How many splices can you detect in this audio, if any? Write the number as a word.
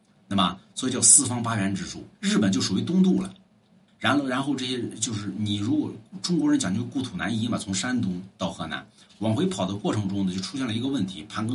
three